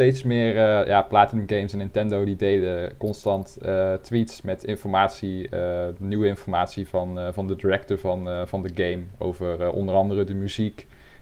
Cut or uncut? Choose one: uncut